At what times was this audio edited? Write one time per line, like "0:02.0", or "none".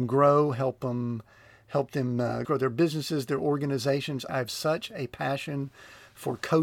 0:02.4
0:04.3